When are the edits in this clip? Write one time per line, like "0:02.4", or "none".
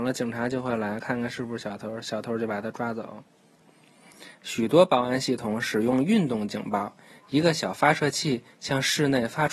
none